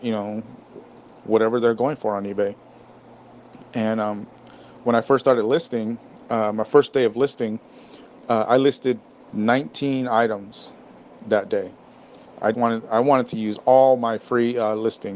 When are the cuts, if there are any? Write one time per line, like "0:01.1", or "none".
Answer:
0:12.5